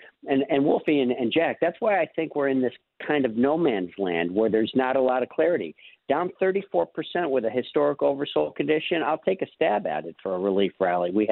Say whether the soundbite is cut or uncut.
uncut